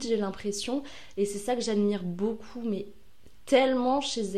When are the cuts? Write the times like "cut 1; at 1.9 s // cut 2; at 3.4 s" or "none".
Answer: none